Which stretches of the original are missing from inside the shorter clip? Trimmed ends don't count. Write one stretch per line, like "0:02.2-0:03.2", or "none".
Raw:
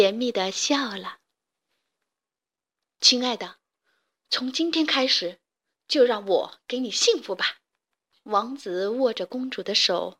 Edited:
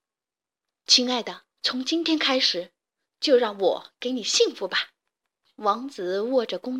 0:03.7-0:04.2

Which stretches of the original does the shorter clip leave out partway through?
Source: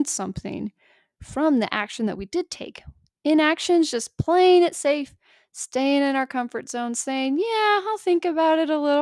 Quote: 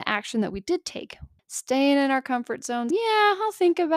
0:03.0-0:05.4
0:06.9-0:07.4

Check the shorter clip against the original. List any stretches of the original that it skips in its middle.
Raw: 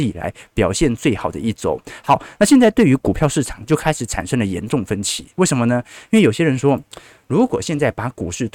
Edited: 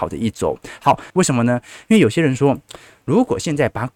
0:02.3-0:05.3

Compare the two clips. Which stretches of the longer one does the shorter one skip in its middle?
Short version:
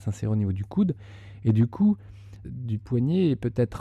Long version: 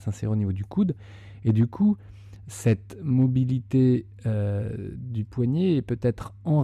0:02.4-0:04.9

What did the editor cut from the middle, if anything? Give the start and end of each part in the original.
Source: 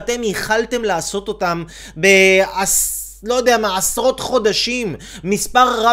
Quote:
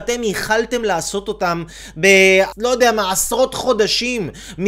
0:02.5-0:03.2

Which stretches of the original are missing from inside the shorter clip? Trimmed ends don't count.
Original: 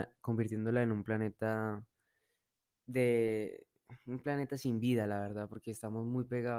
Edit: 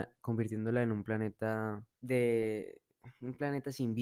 0:01.9-0:02.8

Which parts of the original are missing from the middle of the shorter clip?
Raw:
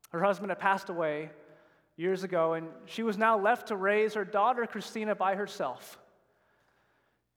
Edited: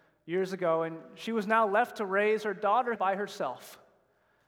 0:04.7-0:05.2

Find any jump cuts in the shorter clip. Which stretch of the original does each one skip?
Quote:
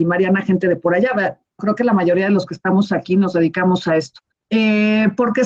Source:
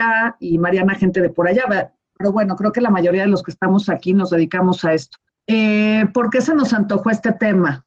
0:02.1-0:02.6

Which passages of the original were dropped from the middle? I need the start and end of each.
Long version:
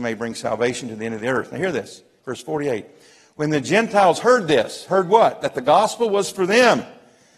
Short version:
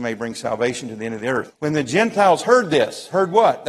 0:01.5-0:03.3

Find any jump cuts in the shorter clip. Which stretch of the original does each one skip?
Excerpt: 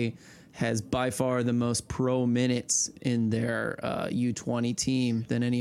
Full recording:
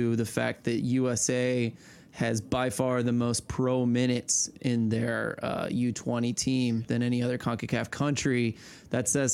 none

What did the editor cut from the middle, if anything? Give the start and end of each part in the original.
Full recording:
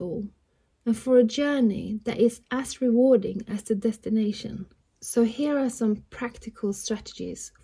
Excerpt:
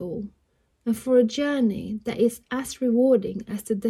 none

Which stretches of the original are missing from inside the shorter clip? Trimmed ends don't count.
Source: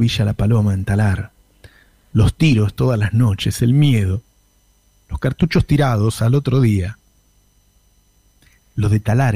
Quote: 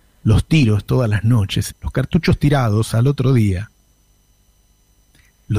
0:03.6-0:05.0

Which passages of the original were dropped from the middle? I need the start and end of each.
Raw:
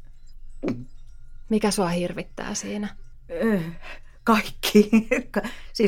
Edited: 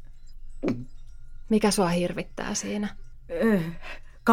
none

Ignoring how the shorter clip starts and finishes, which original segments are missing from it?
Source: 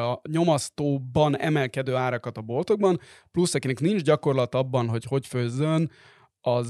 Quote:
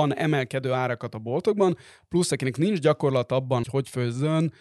0:04.9-0:05.0

